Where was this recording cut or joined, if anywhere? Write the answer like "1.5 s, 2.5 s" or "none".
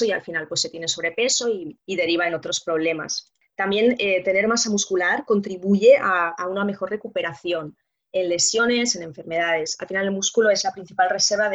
none